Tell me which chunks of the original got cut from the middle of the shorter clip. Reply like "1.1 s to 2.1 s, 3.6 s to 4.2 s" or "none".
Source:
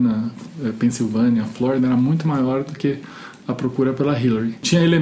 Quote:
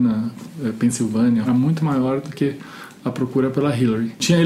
1.5 s to 1.9 s